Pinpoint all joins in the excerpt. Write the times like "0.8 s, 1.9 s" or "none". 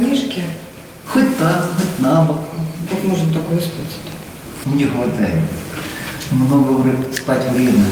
2.9 s, 4.6 s